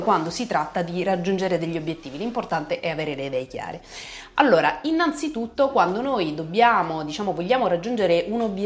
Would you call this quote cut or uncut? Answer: uncut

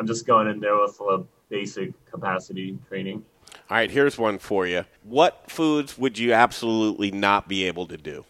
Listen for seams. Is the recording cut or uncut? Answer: cut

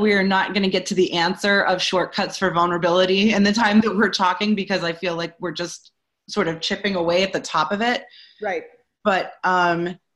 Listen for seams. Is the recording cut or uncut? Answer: uncut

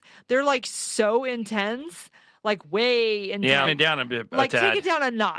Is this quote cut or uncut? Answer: cut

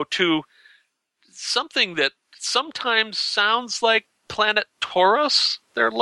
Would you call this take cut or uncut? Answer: uncut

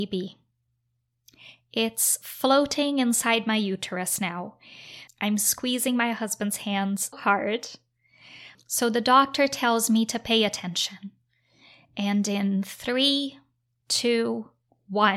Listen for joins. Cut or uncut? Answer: cut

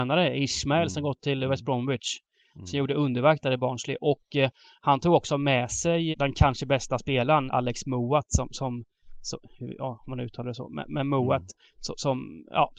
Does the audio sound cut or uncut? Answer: cut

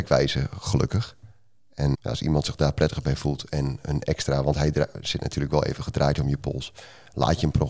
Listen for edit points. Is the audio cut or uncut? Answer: cut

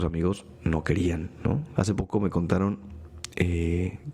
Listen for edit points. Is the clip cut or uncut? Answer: cut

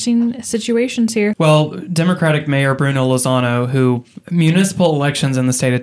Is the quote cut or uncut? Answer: cut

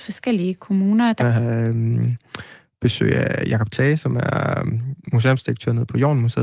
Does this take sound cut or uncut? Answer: cut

